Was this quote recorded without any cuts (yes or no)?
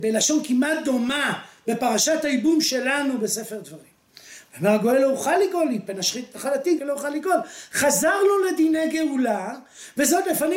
no